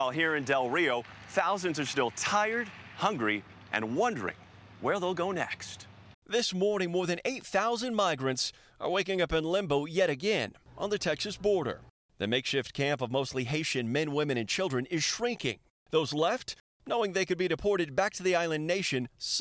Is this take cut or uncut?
cut